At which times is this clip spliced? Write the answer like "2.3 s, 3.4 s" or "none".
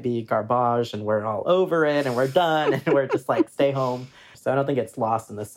4.3 s